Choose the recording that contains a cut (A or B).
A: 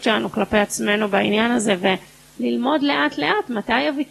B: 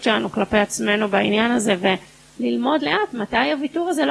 B